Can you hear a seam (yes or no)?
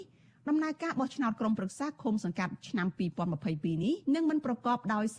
yes